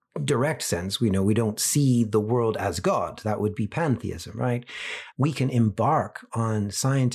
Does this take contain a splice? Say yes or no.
yes